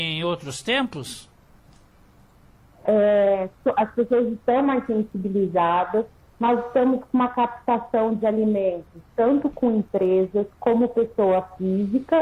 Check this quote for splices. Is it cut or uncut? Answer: cut